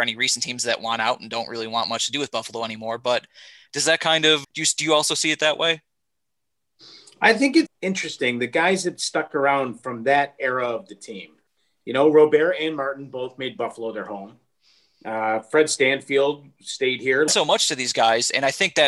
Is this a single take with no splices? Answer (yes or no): no